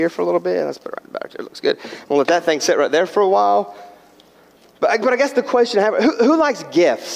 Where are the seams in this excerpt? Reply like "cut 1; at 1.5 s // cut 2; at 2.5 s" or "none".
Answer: none